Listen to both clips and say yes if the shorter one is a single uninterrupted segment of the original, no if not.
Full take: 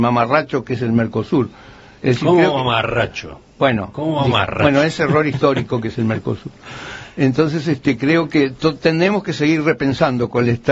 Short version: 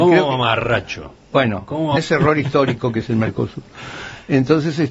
no